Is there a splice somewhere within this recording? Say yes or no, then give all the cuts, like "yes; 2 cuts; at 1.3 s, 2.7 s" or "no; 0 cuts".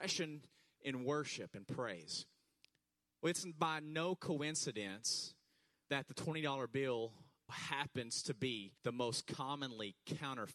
yes; 3 cuts; at 3.0 s, 7.5 s, 8.8 s